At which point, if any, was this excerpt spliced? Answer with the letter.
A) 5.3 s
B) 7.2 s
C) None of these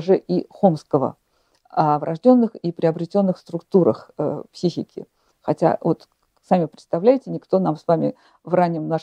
A